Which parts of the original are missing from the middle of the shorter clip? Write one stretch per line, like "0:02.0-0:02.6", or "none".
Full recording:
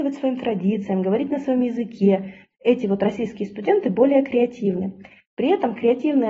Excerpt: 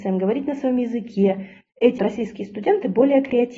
0:02.8-0:03.0

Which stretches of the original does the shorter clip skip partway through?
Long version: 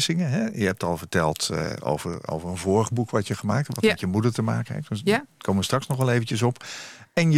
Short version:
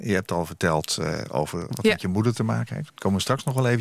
0:02.2-0:03.7
0:04.9-0:05.3

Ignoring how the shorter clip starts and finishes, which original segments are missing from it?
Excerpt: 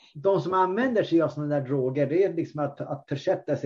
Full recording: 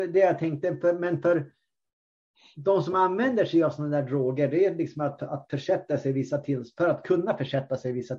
none

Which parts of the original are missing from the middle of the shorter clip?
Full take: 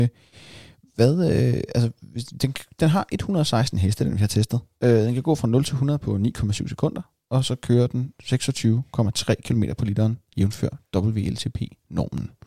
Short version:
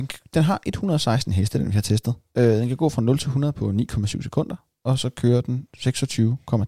none

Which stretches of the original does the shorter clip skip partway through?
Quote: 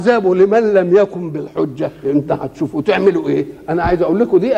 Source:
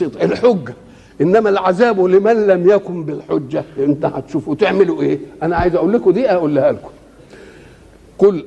none

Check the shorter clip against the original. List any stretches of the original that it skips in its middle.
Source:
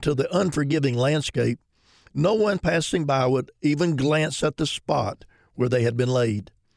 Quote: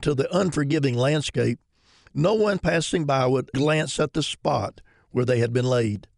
0:03.5-0:04.0

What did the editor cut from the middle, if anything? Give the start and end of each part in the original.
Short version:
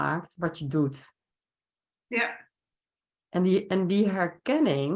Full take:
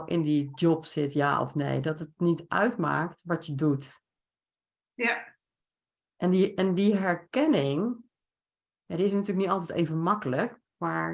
none

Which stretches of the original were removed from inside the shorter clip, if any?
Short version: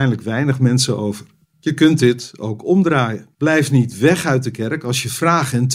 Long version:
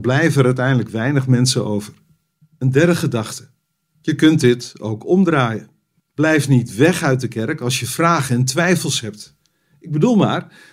0:02.1-0:03.8
0:05.7-0:06.1

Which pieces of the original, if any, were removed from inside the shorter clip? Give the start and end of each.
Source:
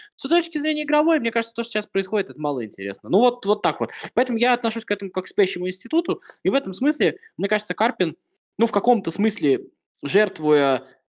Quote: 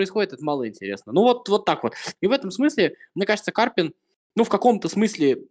0:04.1-0:06.4

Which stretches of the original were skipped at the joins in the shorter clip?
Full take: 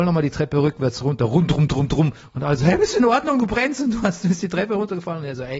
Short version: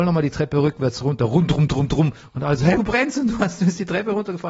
0:02.8-0:03.4

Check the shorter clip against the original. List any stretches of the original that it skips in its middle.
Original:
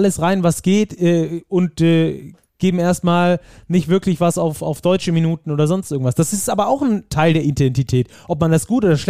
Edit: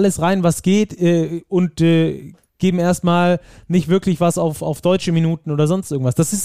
none

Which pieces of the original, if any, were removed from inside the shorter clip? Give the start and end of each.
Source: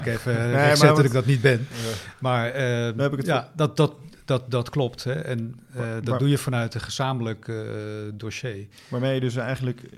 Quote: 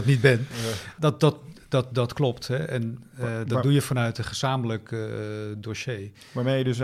0:02.2-0:03.5

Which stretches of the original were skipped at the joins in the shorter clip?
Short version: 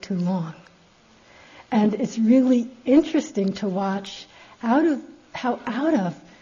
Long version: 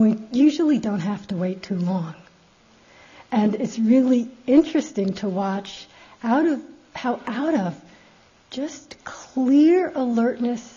none

